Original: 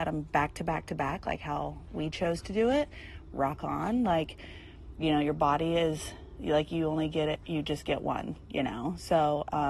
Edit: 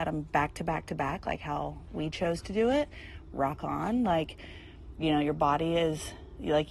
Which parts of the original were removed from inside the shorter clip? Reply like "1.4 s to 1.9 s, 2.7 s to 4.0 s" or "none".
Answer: none